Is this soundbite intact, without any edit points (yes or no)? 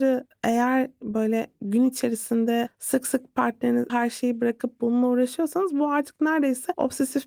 no